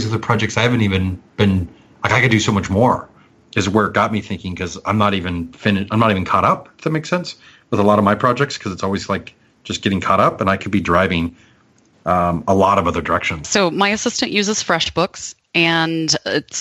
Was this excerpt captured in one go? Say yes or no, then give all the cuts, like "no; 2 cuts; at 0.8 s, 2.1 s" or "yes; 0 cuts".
no; 1 cut; at 13.4 s